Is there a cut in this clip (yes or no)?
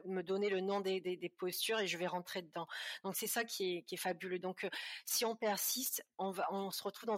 no